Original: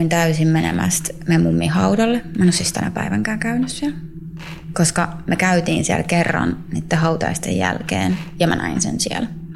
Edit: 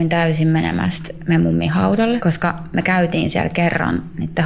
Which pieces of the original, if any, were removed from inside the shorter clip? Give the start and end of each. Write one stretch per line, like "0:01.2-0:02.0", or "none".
0:02.2-0:04.7